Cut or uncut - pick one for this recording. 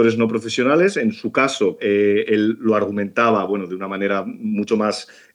cut